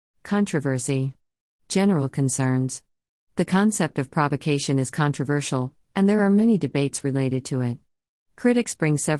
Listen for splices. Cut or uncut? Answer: uncut